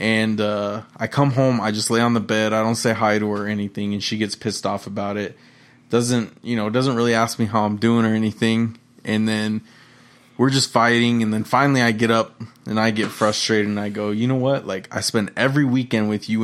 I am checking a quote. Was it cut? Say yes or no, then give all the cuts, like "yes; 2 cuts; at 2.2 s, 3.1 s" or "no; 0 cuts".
no; 0 cuts